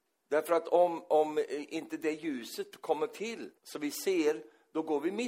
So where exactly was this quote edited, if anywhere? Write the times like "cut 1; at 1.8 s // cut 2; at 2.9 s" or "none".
cut 1; at 3.6 s